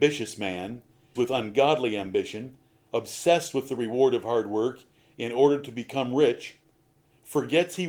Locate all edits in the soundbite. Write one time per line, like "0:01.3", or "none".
0:01.2